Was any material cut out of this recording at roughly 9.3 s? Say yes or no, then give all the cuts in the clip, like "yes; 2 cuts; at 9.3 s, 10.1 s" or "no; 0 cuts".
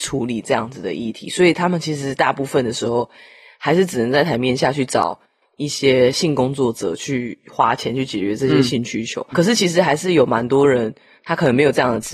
yes; 1 cut; at 9.3 s